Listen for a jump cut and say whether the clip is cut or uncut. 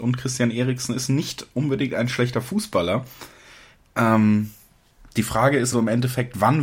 cut